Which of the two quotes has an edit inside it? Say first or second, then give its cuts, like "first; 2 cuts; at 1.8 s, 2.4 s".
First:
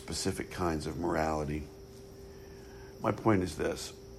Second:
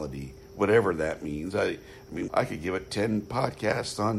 second; 1 cut; at 2.3 s